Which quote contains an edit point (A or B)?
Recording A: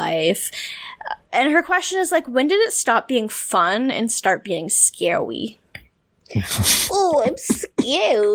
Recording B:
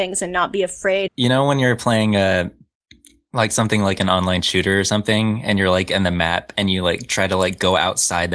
B